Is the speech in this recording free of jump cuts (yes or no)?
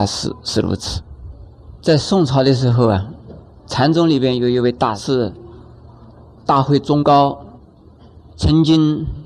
yes